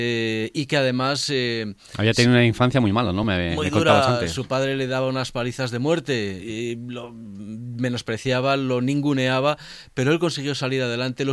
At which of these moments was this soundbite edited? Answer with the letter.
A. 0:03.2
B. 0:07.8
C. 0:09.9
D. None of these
D